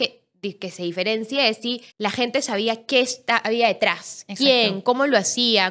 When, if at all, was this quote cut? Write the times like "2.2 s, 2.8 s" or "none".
1.9 s